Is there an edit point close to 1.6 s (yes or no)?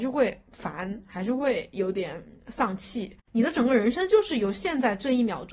no